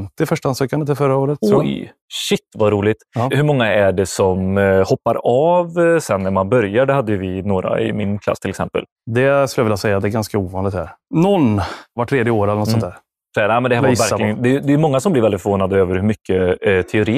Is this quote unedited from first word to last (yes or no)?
yes